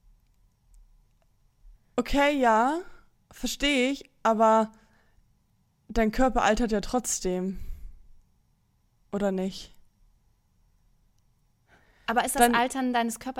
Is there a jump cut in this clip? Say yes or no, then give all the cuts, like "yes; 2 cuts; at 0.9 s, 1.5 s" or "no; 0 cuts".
yes; 1 cut; at 1.8 s